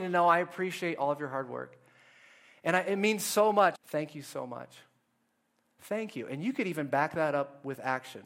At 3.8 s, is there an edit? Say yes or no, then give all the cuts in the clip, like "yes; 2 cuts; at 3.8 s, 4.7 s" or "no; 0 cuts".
yes; 1 cut; at 3.8 s